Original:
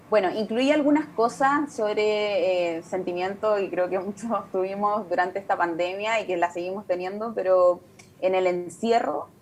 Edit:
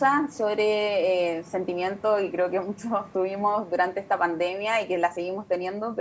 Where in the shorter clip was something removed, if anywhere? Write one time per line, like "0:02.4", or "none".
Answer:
none